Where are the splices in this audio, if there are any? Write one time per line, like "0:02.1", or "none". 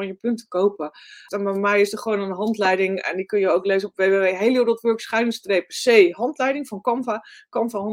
0:01.3